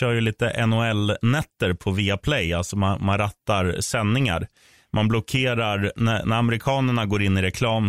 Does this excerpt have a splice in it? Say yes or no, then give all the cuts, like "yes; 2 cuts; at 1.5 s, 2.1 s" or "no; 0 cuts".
no; 0 cuts